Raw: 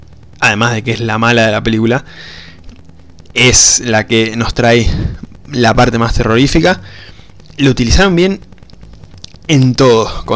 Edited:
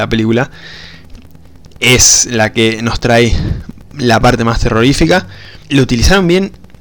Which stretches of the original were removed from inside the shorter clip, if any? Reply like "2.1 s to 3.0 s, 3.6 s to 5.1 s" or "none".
7.1 s to 7.5 s